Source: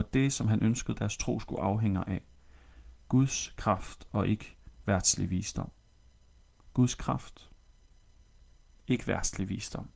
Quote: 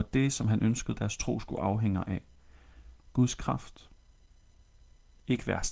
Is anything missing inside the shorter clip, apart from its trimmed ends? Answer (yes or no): yes